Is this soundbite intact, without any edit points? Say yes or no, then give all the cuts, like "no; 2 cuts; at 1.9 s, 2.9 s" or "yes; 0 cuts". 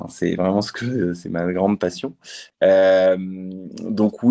no; 1 cut; at 2.5 s